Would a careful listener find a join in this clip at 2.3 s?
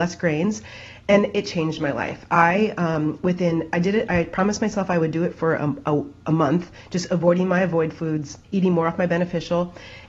no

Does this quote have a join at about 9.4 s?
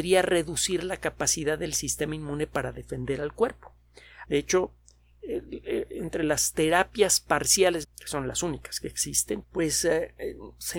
yes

